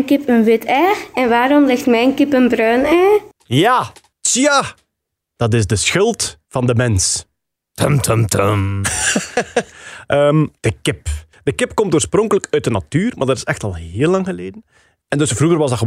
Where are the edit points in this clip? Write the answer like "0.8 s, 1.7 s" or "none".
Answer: none